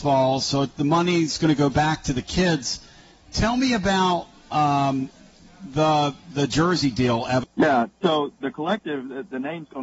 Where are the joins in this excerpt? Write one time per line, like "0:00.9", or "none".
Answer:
0:07.4

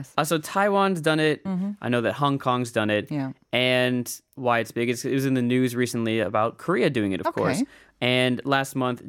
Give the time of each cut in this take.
0:01.4

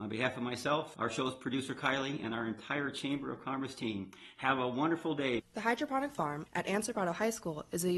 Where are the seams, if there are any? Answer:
0:05.4
0:06.5

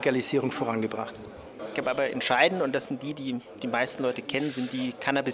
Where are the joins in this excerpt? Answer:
0:01.6

